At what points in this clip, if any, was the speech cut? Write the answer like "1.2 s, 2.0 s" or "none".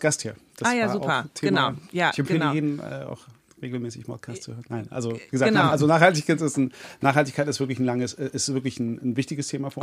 none